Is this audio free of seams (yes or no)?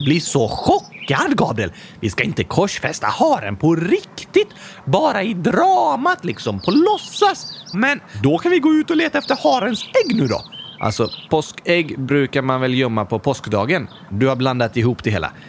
no